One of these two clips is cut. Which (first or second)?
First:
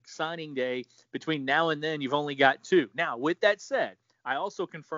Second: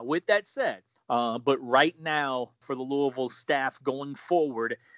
second